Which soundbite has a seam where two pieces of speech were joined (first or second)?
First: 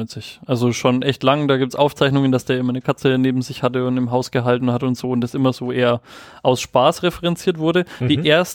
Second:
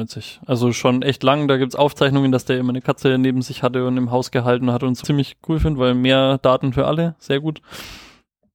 second